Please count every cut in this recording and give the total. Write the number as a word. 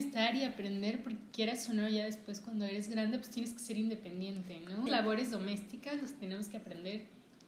one